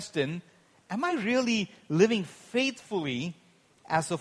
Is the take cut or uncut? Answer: uncut